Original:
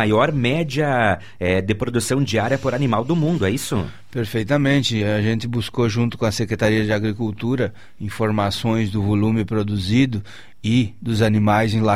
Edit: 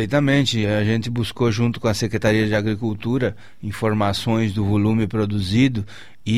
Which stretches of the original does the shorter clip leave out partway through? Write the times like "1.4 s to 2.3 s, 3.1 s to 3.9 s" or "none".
none